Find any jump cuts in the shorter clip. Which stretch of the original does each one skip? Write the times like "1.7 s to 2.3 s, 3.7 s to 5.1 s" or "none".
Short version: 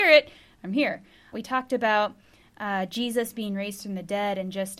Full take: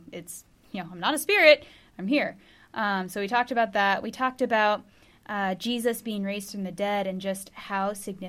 2.7 s to 4.0 s